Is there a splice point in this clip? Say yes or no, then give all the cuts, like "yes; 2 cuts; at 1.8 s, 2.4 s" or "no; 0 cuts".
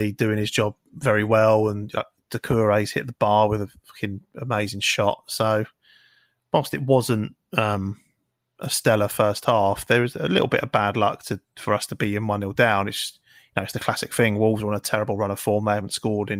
no; 0 cuts